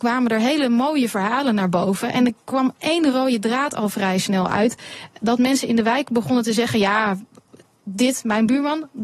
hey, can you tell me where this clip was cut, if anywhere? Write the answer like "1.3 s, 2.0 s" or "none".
none

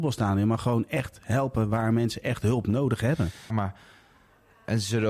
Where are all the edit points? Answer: 3.5 s

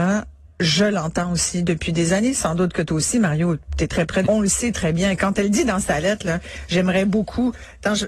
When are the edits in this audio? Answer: 4.3 s

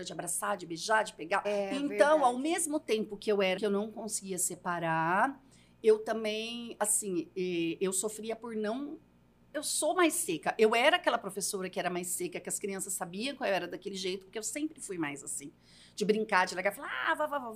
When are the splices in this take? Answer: 1.4 s, 3.6 s, 14.3 s

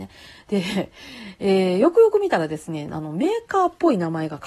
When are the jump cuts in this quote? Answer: none

